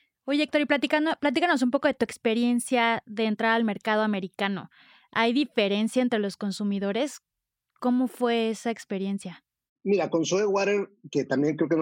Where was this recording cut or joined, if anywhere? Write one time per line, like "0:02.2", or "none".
none